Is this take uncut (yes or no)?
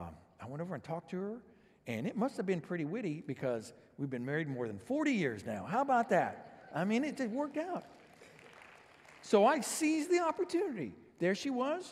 yes